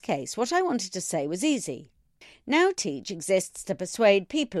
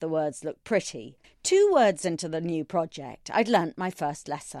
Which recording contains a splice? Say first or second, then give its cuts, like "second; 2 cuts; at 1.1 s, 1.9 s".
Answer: second; 1 cut; at 1.2 s